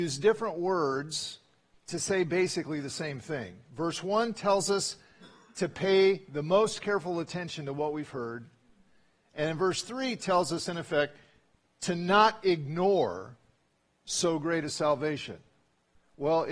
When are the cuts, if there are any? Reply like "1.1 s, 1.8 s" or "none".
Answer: none

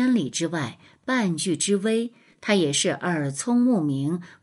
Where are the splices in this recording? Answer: none

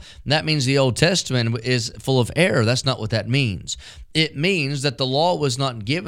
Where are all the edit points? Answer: none

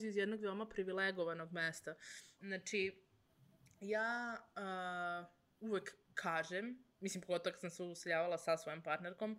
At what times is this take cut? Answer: 2.4 s

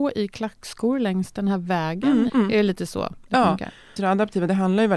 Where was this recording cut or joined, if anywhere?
2.3 s, 4.0 s

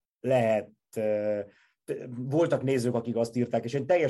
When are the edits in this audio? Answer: none

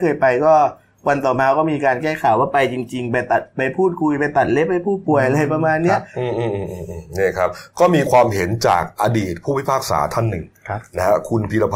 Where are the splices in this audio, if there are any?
none

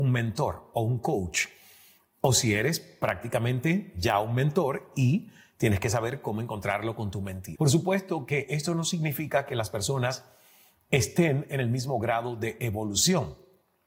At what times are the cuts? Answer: 7.6 s

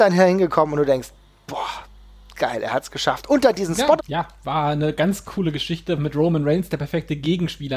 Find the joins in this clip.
4.0 s, 6.0 s

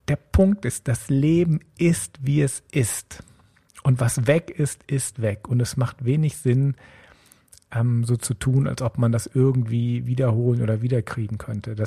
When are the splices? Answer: none

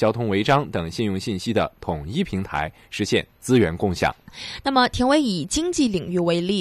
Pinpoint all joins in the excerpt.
4.3 s

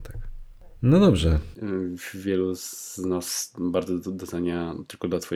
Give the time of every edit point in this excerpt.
1.5 s

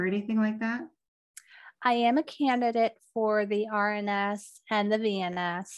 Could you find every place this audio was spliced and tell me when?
none

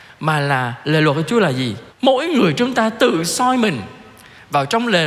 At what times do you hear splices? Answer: 1.9 s

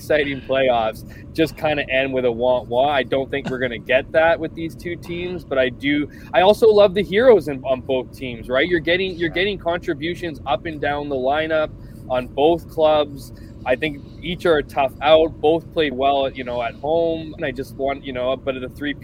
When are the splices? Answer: 15.9 s, 17.4 s

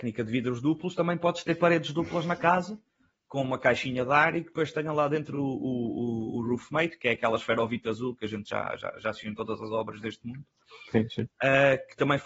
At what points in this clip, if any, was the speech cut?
none

